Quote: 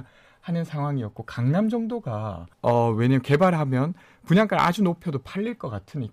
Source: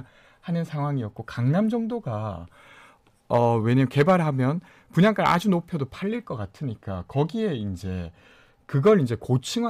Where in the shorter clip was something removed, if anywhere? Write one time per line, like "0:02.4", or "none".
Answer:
0:02.5